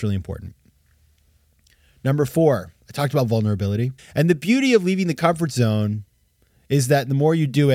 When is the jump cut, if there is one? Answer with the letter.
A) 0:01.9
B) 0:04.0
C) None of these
B